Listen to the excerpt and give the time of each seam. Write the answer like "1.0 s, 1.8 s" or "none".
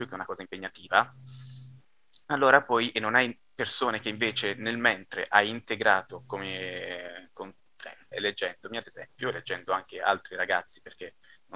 8.1 s